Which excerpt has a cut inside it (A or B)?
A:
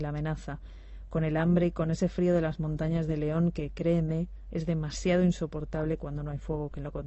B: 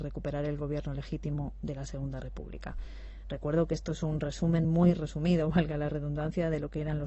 B